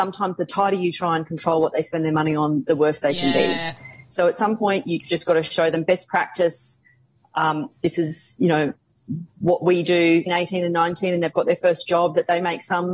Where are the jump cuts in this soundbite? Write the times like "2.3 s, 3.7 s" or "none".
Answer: 10.3 s